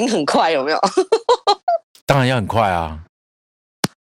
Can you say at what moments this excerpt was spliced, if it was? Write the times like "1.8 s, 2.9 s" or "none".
none